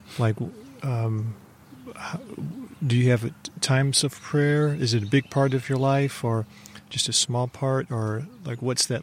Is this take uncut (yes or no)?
yes